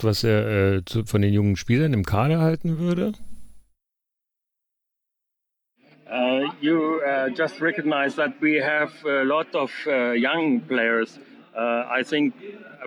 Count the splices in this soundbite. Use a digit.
0